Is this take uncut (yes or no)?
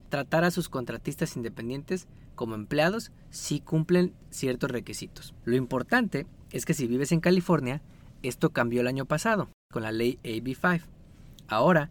no